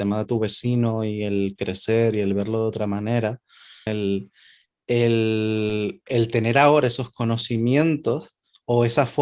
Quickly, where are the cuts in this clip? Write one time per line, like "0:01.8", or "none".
0:03.9